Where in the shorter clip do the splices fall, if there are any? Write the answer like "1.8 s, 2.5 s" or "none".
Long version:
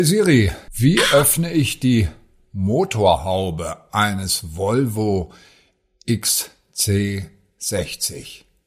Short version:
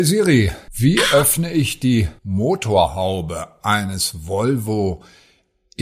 2.2 s